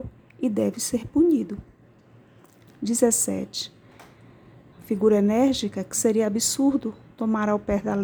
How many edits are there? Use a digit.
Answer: 2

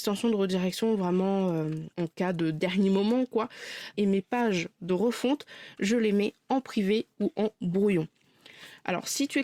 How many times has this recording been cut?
2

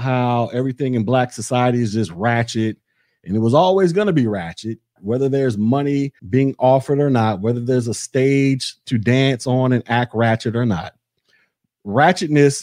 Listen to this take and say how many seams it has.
2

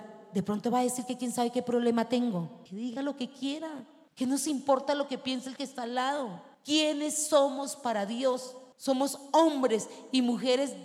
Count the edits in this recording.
0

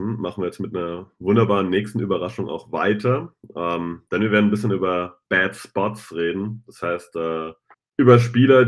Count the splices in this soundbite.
0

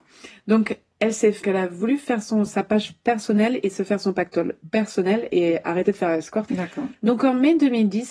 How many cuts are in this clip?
3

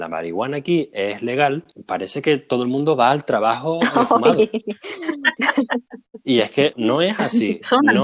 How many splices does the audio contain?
1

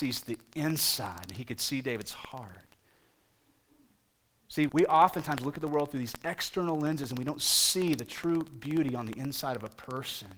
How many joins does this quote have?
1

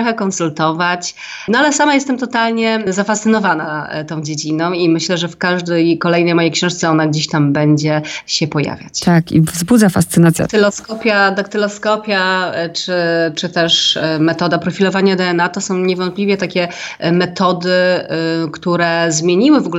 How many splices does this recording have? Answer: 1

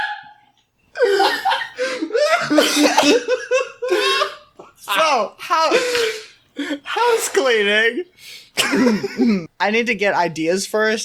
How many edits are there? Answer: 1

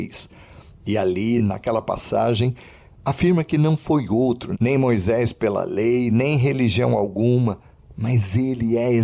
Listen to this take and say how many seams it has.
0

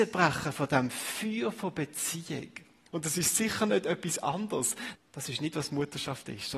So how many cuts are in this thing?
1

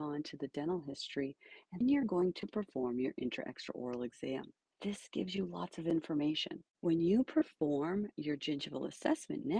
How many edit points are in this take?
2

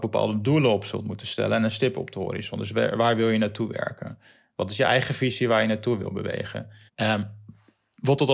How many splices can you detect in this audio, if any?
1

